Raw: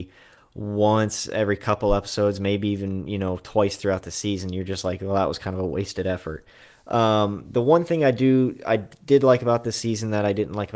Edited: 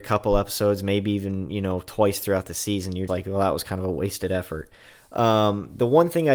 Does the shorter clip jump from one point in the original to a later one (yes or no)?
yes